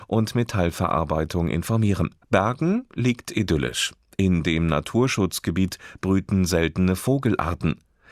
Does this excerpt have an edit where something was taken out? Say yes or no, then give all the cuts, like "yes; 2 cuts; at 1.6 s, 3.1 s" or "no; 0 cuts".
yes; 1 cut; at 2.2 s